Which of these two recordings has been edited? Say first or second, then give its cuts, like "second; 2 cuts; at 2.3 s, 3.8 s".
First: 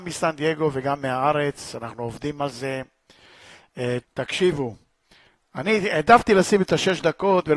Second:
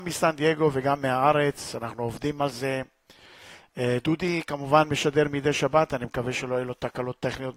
first; 1 cut; at 4.0 s